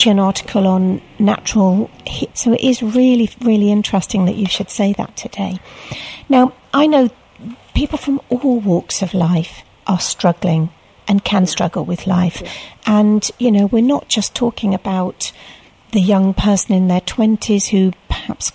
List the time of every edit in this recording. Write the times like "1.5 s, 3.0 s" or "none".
2.3 s